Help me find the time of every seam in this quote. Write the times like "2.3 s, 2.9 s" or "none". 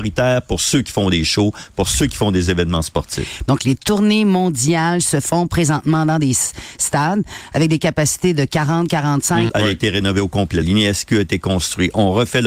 3.5 s, 9.5 s, 10.6 s